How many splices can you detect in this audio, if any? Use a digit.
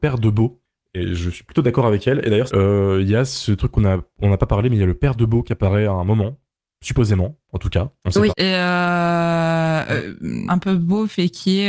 3